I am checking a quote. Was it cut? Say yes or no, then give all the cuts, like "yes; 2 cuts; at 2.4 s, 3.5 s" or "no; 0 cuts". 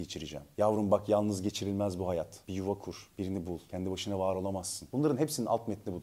no; 0 cuts